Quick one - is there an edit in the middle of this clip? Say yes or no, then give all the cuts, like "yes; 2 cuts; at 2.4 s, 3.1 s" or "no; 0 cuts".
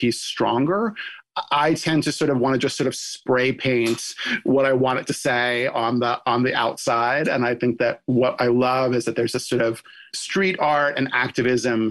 no; 0 cuts